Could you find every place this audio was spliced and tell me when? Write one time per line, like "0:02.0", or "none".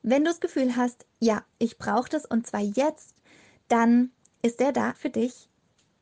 0:04.9